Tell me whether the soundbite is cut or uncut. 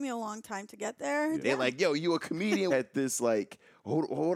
cut